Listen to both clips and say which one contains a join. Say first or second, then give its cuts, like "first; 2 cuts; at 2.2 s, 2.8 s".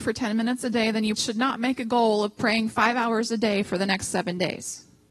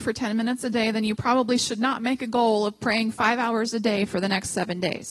first; 1 cut; at 1.2 s